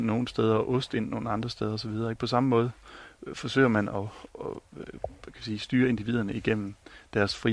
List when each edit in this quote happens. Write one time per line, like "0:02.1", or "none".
0:04.3